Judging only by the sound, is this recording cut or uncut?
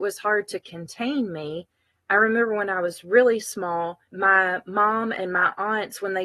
cut